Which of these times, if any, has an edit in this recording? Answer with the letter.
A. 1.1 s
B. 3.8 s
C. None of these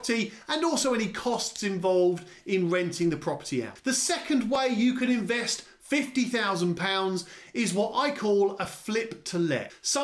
C